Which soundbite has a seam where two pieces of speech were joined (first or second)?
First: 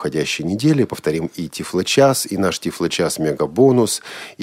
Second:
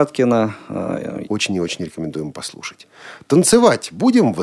second